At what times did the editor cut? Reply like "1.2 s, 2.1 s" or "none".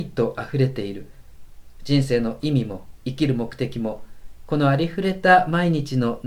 4.5 s